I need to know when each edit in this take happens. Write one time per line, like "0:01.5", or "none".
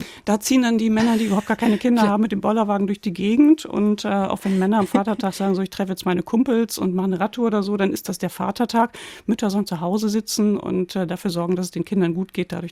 none